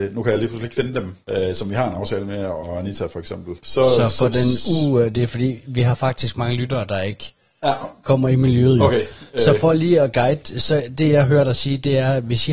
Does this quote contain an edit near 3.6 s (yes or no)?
no